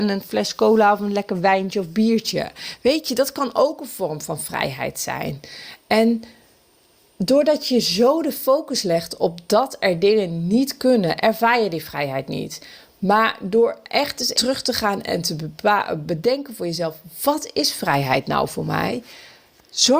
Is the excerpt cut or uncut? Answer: cut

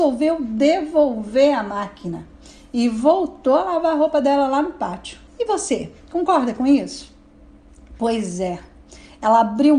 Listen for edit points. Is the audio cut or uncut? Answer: cut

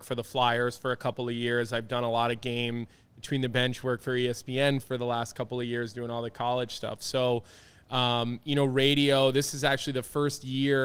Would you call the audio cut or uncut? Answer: uncut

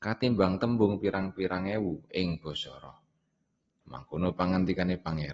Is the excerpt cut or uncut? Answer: cut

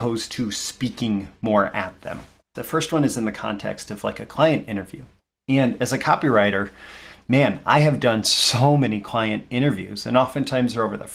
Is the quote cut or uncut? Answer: cut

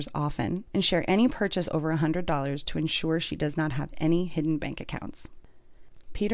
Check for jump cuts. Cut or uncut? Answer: uncut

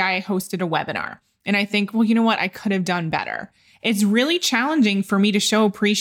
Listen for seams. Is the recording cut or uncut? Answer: uncut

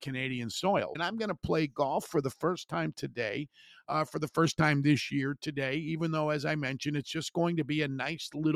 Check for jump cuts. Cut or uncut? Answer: cut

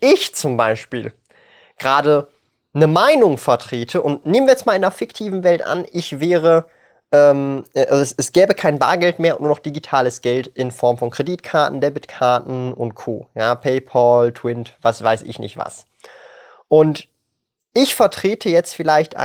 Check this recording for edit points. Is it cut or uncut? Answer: uncut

